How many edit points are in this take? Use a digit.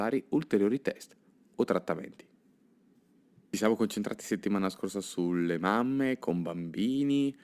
0